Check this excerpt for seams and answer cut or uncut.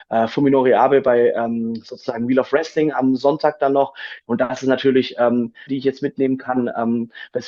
cut